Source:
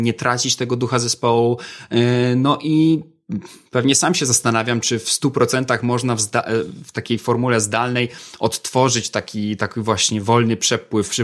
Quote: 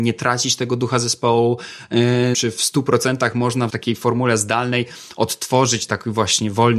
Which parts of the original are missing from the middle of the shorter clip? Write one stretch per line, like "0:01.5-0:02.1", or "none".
0:02.3-0:04.8
0:06.2-0:06.9
0:09.1-0:09.6